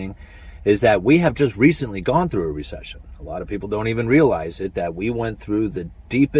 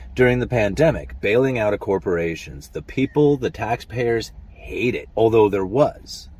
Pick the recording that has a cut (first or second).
second